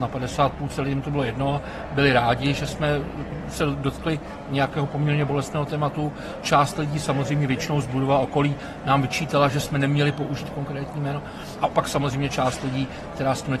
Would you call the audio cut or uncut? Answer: uncut